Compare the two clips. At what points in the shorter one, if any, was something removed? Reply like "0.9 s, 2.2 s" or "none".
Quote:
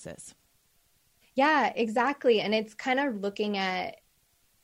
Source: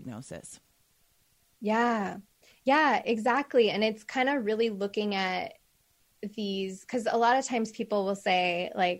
1.2 s, 3.1 s